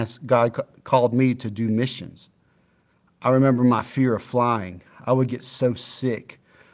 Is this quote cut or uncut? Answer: uncut